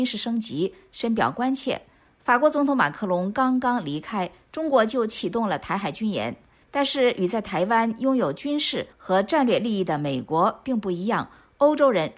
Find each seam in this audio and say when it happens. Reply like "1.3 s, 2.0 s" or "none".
none